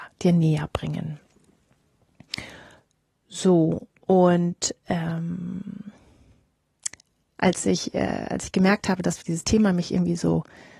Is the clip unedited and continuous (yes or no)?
no